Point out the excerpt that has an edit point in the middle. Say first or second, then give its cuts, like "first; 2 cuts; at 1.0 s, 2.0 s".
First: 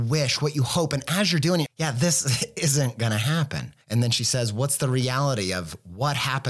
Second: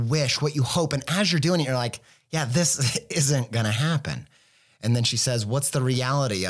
first; 2 cuts; at 1.7 s, 3.8 s